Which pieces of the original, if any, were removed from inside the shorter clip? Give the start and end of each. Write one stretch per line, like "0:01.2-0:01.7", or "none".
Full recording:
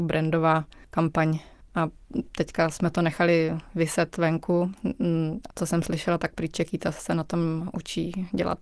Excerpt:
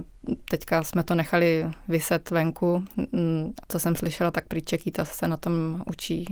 none